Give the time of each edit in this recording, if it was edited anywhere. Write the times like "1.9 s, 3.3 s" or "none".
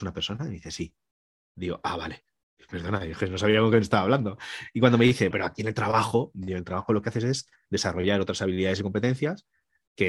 5.3 s